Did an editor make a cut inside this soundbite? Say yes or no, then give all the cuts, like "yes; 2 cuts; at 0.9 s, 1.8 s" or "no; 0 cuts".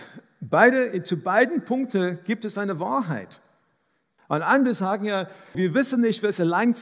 yes; 2 cuts; at 4.2 s, 5.5 s